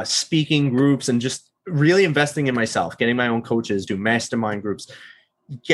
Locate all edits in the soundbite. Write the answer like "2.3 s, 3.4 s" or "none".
3.9 s